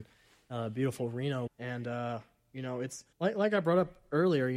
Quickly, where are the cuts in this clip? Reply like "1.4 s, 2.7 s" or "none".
1.5 s, 3.1 s